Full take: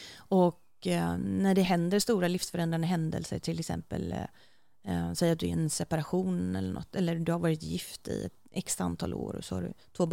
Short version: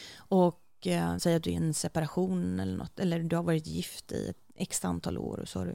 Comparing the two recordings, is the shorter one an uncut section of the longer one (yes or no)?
no